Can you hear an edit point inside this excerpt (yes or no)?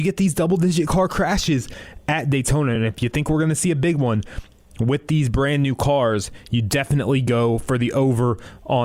no